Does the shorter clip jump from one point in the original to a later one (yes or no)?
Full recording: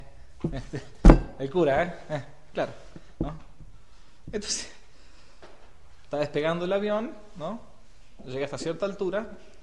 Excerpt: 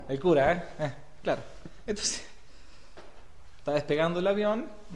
yes